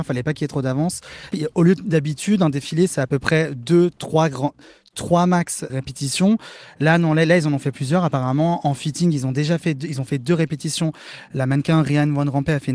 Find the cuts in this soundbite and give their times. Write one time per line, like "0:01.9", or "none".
0:01.3
0:05.7